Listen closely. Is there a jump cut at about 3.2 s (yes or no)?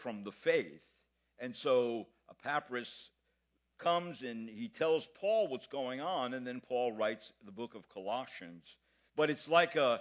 no